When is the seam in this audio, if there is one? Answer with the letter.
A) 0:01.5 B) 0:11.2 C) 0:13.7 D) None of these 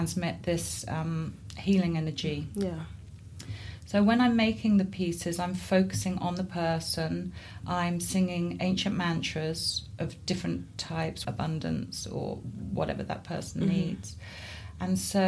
B